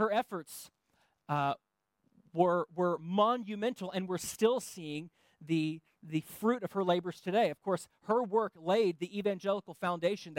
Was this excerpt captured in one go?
yes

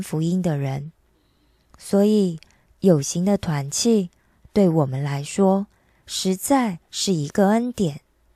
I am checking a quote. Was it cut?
yes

